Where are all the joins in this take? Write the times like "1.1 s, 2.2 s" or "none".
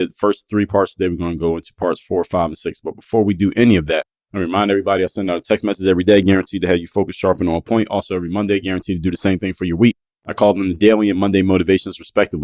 none